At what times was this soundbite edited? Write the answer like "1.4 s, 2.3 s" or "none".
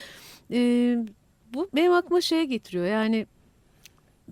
1.7 s